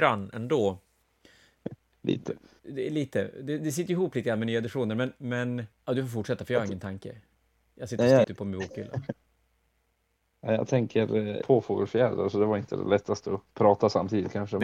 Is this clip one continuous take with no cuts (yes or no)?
no